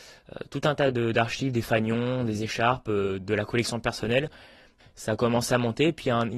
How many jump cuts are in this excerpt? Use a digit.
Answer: 1